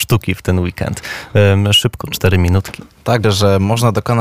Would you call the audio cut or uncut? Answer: cut